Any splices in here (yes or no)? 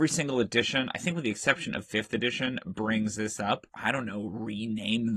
yes